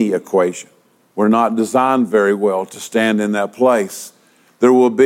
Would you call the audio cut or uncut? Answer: cut